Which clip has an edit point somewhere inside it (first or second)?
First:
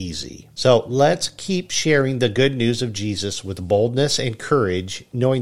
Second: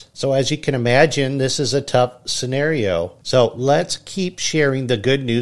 second